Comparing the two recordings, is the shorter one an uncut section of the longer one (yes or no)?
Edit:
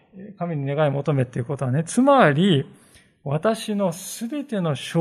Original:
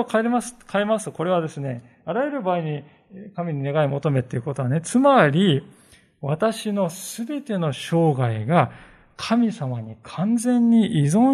yes